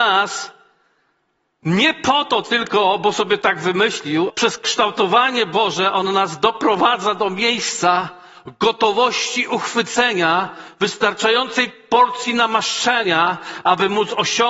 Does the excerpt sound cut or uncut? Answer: cut